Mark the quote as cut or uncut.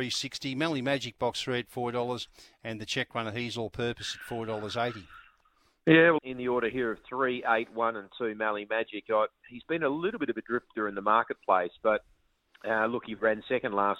cut